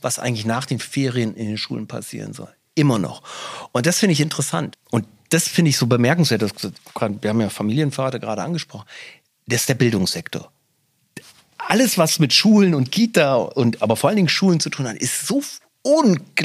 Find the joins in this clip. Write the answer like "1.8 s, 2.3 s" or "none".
4.7 s